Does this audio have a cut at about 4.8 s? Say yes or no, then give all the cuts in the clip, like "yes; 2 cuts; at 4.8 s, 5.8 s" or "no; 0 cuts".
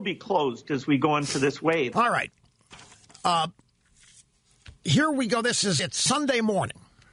yes; 3 cuts; at 1.9 s, 4.8 s, 5.8 s